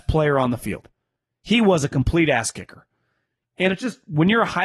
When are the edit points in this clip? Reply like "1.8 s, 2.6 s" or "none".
3.4 s